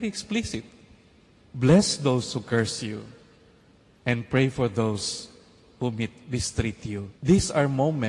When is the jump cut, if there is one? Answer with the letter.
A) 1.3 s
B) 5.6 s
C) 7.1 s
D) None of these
C